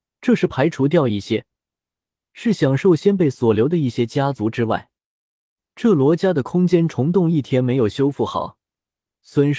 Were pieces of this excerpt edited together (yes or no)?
no